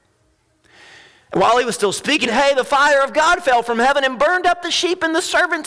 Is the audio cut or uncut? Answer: cut